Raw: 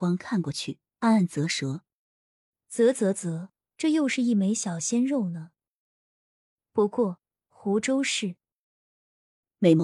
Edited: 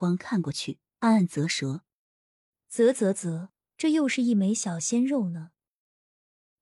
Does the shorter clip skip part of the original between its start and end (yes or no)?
no